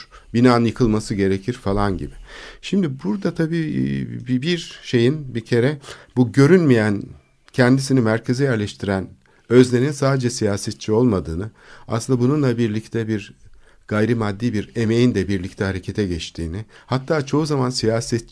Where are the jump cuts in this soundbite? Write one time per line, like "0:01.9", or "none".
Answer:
none